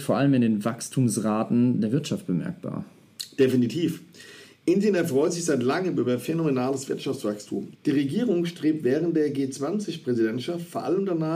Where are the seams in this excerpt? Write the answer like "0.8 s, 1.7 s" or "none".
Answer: 7.7 s